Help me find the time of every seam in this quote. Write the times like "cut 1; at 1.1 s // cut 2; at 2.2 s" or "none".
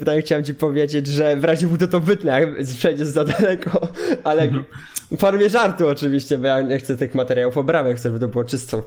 none